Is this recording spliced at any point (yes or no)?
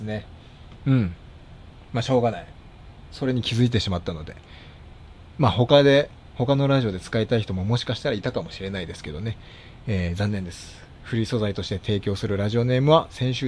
no